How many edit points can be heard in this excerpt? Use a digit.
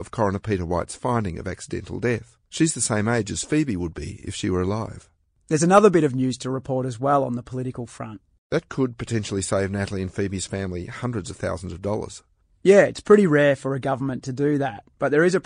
1